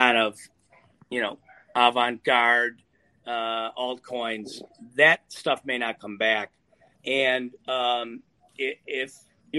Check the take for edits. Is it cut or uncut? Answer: cut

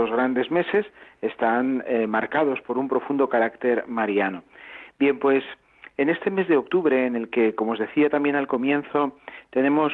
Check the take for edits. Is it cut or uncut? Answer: cut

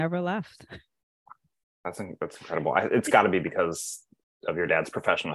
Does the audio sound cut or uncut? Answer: uncut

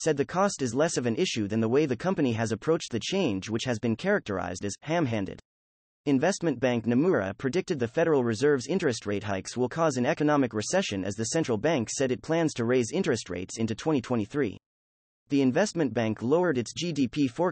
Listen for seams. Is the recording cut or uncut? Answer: uncut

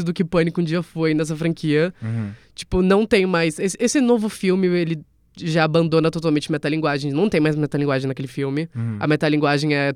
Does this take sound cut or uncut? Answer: uncut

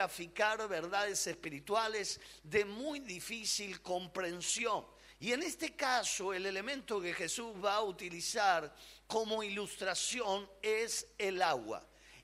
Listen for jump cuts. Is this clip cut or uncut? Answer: uncut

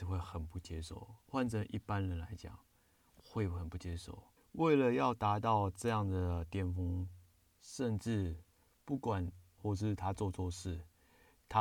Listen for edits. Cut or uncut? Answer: cut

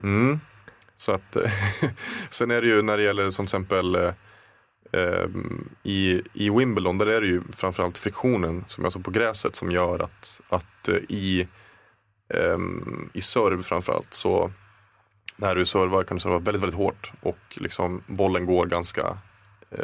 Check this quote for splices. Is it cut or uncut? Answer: uncut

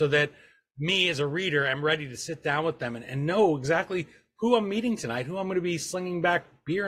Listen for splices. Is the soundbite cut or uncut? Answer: uncut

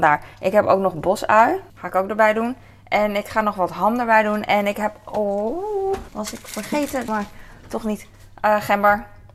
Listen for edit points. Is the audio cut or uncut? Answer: cut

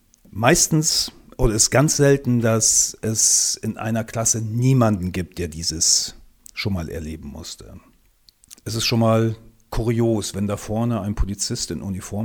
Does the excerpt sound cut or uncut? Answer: cut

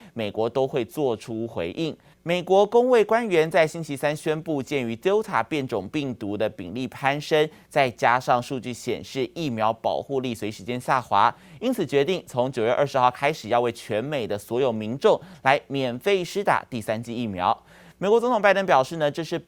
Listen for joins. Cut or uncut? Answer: cut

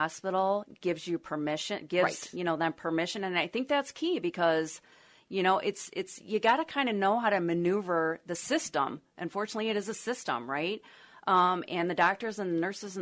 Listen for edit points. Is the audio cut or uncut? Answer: uncut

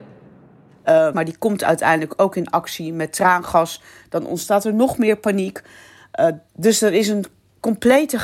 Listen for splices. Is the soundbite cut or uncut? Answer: cut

